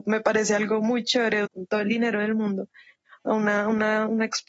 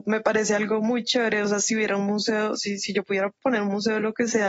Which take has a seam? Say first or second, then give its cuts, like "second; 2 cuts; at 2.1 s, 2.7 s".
first; 1 cut; at 1.4 s